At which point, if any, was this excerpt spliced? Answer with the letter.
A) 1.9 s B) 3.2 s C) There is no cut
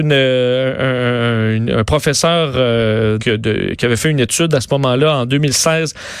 B